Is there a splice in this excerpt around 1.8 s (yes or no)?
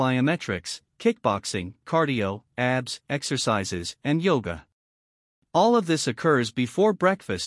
no